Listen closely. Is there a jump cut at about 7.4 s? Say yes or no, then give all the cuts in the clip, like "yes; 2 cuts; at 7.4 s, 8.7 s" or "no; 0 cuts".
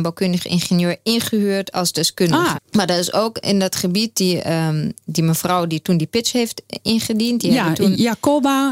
no; 1 cut; at 2.6 s